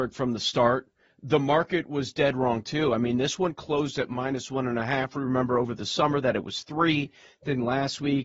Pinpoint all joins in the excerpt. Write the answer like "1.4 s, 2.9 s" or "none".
none